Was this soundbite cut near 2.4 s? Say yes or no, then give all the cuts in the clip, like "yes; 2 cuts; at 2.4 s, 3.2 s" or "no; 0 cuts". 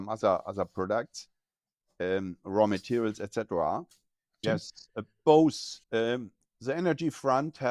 no; 2 cuts; at 4.4 s, 5.8 s